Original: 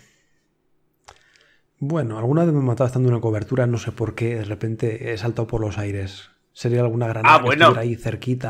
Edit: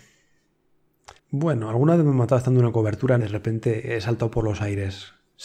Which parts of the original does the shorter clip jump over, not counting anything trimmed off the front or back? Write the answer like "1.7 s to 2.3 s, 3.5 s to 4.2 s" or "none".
1.2 s to 1.7 s, 3.7 s to 4.4 s